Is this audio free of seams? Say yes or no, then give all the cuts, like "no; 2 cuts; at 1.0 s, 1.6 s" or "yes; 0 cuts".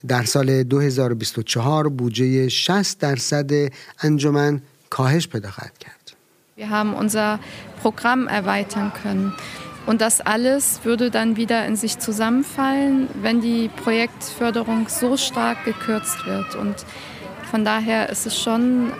yes; 0 cuts